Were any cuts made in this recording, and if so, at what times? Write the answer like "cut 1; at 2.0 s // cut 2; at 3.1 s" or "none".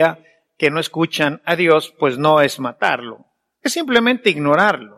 none